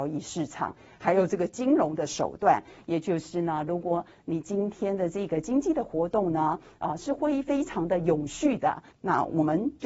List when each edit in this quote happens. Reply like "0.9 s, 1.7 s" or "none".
8.9 s

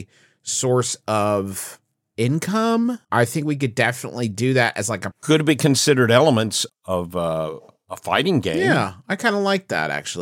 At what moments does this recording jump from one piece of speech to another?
3.0 s, 5.1 s, 6.7 s

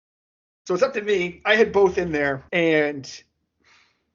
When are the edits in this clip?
2.5 s

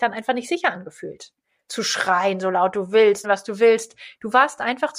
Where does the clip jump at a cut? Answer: 3.2 s

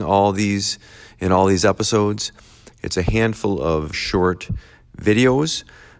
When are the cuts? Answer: 2.7 s, 3.9 s

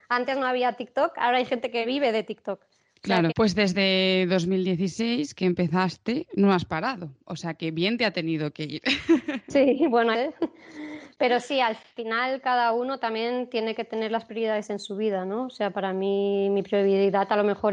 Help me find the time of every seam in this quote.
3.3 s, 10.1 s

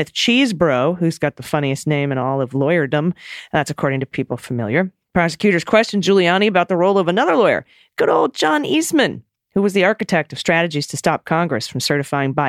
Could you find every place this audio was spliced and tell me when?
none

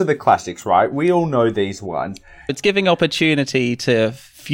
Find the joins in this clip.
2.5 s

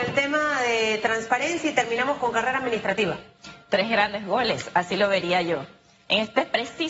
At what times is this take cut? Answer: none

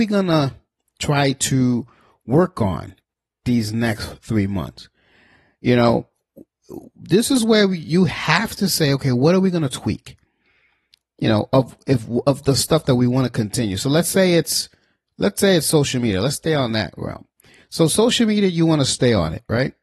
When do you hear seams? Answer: none

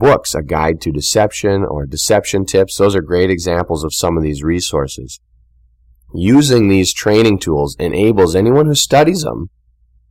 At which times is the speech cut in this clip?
none

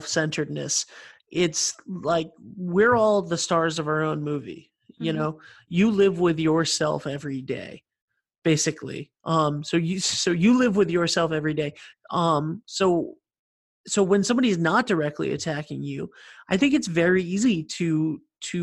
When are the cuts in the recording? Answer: 11.9 s

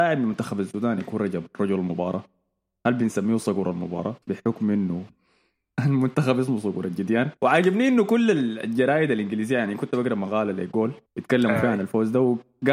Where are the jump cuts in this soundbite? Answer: 4.2 s, 7.4 s, 11.1 s

